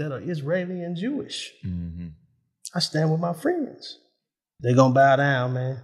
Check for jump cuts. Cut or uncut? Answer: cut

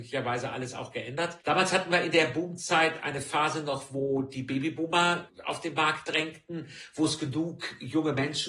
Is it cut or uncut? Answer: uncut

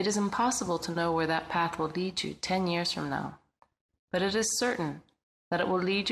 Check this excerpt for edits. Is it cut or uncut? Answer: uncut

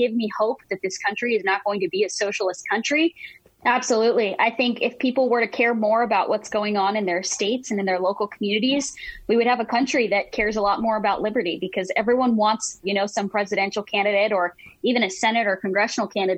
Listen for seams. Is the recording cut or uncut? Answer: cut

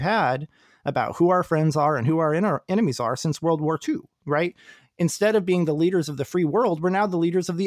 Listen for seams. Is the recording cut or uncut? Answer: uncut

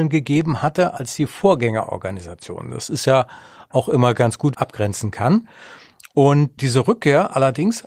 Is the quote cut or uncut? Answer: cut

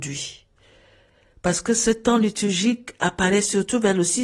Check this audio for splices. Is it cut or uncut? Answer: uncut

